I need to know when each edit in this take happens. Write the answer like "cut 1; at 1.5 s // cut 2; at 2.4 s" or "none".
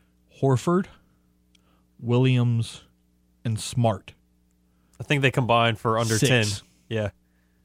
none